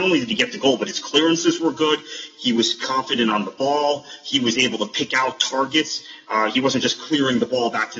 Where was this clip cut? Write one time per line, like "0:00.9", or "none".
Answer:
0:02.3